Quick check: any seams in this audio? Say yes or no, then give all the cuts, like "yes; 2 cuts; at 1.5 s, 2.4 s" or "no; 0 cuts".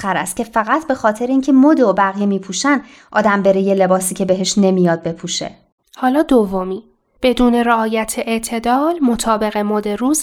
yes; 1 cut; at 5.8 s